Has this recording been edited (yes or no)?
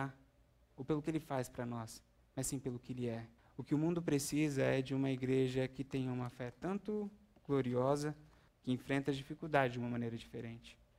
yes